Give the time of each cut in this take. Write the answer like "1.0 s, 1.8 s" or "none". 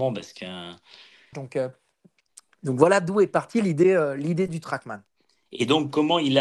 1.3 s